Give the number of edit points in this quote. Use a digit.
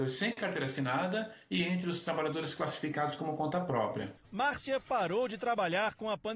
1